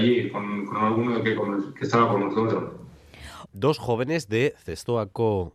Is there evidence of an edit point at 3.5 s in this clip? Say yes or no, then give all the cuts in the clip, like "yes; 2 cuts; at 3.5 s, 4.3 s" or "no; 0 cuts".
yes; 1 cut; at 3.5 s